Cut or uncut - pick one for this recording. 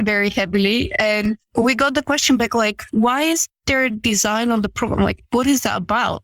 uncut